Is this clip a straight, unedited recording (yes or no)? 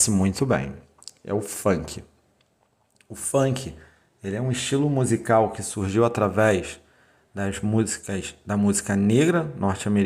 yes